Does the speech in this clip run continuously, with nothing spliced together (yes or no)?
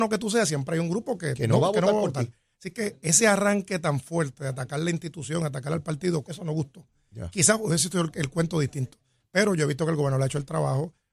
no